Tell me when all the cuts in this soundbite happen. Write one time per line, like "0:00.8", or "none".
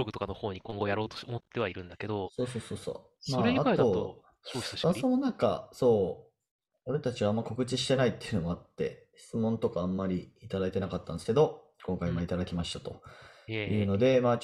none